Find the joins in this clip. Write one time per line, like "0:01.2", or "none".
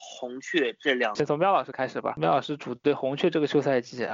0:01.2